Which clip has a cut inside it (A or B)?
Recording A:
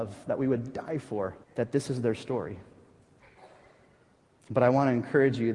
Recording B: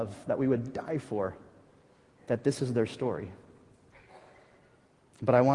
A